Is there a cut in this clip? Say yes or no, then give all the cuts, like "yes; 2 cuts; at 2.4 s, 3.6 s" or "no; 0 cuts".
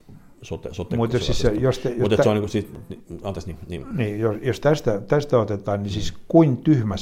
no; 0 cuts